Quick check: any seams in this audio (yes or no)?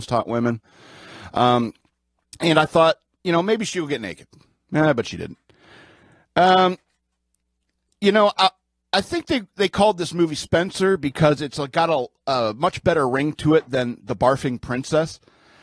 no